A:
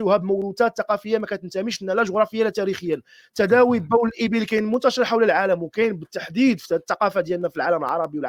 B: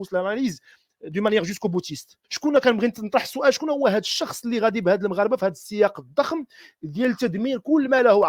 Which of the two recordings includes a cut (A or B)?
B